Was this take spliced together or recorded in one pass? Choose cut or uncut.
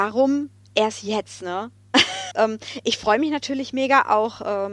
cut